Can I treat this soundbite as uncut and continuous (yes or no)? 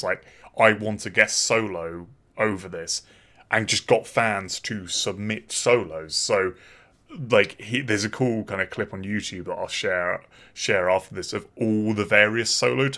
yes